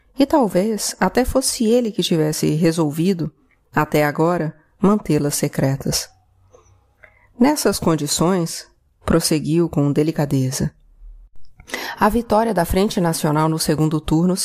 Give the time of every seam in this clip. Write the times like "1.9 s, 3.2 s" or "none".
none